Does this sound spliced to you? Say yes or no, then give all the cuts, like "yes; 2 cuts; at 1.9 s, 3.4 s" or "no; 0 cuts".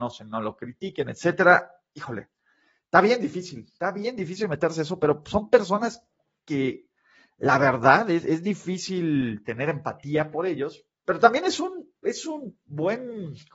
no; 0 cuts